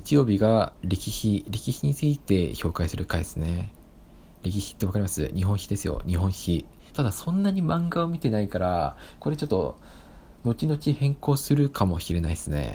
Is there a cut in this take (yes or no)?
yes